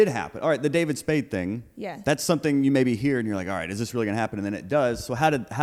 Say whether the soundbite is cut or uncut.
uncut